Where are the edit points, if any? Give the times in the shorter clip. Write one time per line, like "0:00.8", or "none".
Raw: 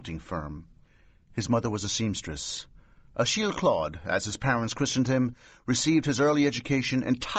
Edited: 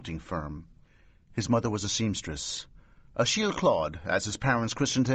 none